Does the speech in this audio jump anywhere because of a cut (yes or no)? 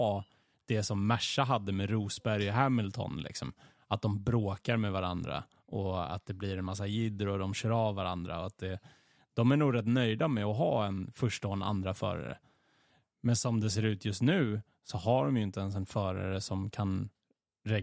no